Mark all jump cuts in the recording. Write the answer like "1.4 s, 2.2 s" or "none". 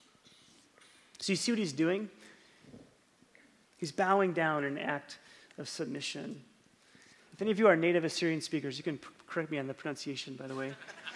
3.7 s, 7.2 s